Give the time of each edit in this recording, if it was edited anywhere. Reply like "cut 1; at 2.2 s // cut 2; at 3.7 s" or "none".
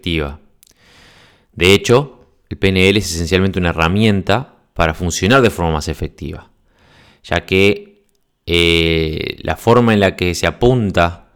none